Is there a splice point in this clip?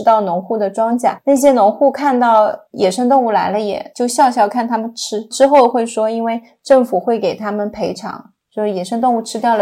no; 0 cuts

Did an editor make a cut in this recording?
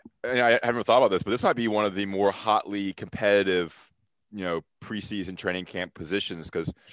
no; 0 cuts

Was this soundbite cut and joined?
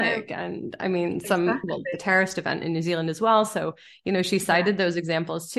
no; 0 cuts

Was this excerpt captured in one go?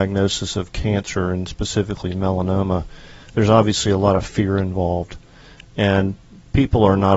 yes; 0 cuts

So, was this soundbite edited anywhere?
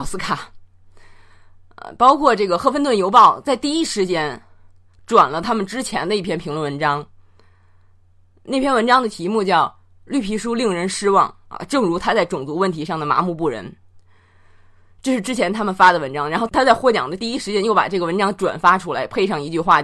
no; 0 cuts

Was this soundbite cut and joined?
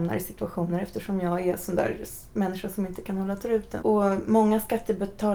yes; 1 cut; at 3.8 s

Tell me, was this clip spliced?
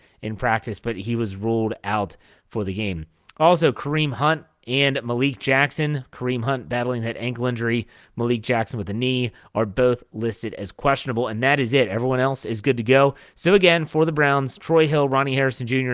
no; 0 cuts

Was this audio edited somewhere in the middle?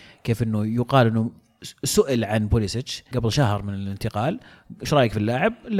yes; 1 cut; at 3.1 s

